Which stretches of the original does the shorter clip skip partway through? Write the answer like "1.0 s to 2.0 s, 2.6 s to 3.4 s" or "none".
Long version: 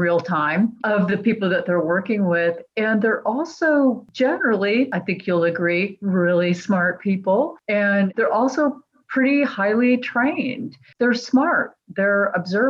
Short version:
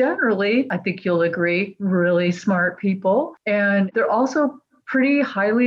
none

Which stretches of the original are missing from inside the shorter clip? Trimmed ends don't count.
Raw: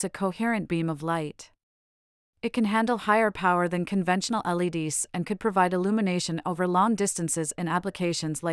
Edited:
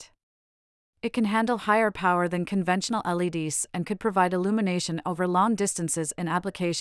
none

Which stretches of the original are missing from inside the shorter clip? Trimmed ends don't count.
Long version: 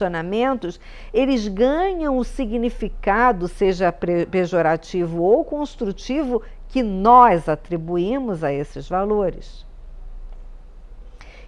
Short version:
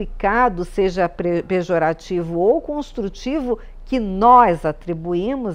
none

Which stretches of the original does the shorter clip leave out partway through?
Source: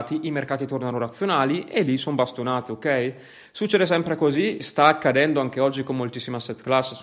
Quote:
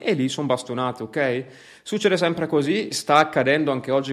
none

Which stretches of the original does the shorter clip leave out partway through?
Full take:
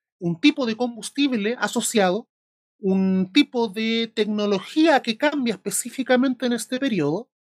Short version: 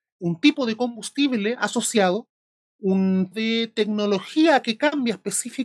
3.3 s to 3.7 s

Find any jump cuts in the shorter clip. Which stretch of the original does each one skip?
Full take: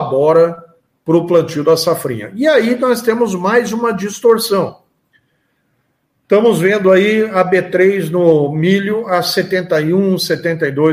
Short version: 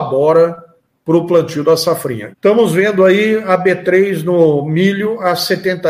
2.3 s to 6.2 s

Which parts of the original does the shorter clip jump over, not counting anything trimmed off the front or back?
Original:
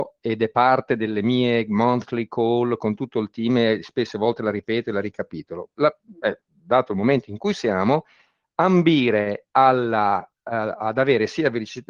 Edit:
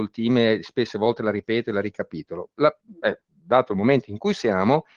none

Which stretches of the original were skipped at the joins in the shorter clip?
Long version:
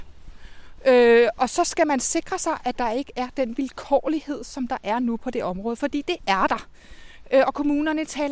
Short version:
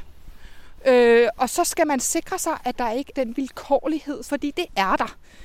3.1 s to 3.3 s, 4.5 s to 5.8 s

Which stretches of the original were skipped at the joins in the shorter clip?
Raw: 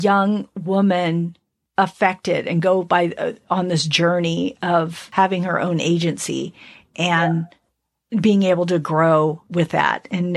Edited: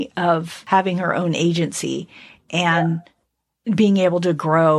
none

